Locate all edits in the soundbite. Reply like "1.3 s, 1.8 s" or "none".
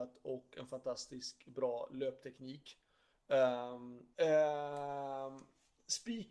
4.1 s